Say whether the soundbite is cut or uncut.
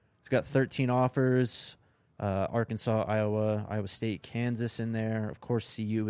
uncut